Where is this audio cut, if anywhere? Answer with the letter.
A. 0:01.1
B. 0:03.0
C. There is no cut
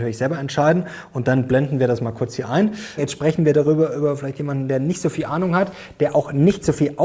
B